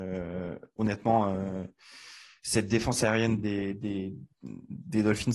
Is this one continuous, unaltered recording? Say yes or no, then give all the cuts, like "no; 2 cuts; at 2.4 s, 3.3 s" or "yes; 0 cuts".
yes; 0 cuts